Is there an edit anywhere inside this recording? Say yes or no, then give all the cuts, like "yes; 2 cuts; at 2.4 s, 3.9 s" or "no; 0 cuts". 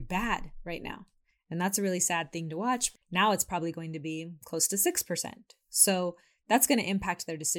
yes; 2 cuts; at 1.3 s, 3.0 s